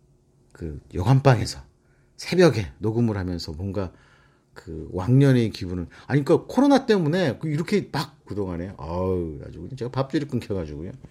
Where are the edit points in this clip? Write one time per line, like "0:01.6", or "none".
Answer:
0:08.3

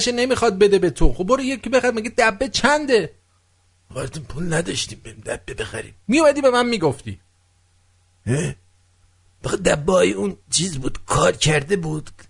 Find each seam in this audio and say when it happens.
0:10.4

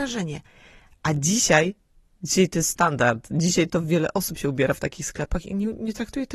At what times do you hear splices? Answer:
none

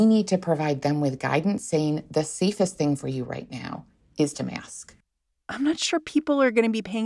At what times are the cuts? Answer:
0:05.4

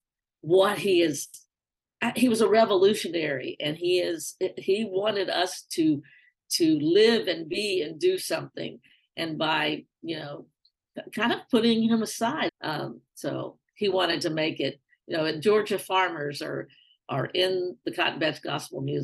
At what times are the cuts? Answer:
0:12.5

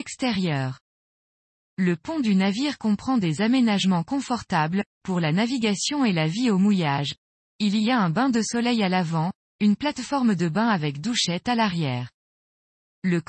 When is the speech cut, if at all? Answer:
none

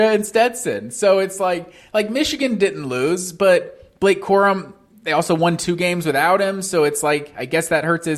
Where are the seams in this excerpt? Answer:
none

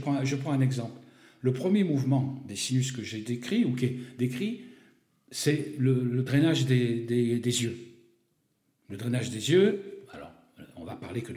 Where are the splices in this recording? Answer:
none

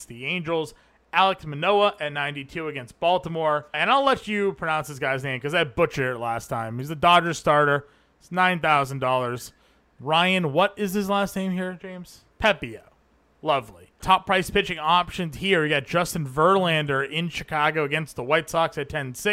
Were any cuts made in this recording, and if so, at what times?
0:14.0

